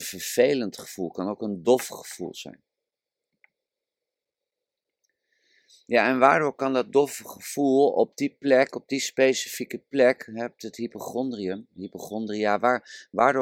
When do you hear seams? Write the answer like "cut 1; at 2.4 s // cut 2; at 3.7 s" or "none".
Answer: none